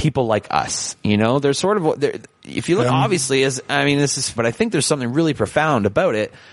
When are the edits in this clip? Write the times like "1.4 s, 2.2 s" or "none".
2.9 s, 4.4 s